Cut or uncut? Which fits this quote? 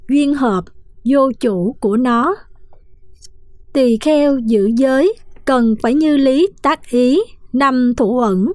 uncut